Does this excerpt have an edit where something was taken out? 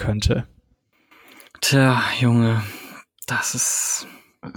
no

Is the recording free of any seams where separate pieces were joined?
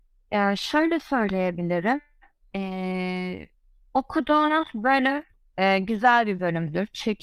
yes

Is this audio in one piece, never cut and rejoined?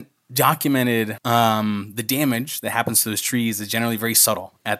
yes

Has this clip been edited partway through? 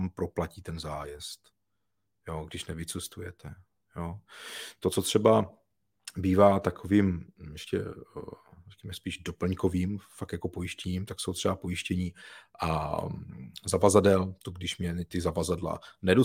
no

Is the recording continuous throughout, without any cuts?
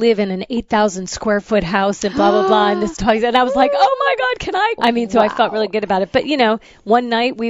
no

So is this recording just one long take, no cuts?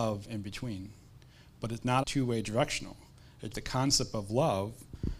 no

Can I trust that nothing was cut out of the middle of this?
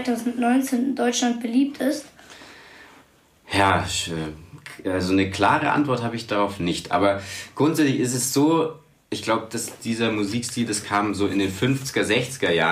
no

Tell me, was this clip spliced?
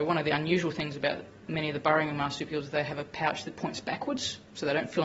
no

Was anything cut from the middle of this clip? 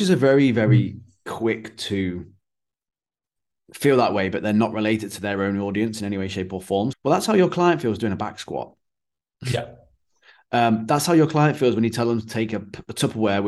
yes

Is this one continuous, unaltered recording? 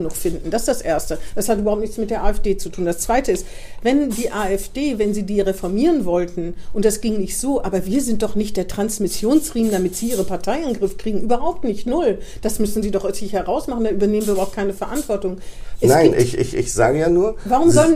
yes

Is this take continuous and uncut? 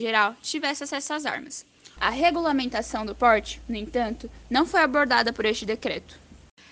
no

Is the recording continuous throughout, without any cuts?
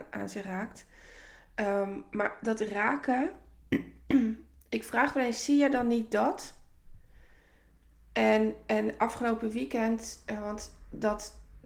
yes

